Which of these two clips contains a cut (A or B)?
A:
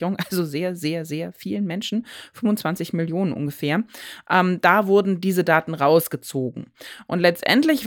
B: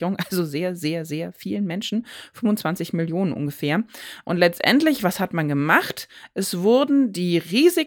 B